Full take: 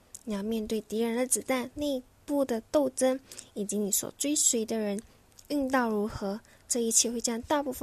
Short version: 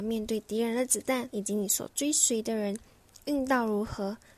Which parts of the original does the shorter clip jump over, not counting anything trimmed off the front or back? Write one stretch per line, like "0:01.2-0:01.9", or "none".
0:01.7-0:03.5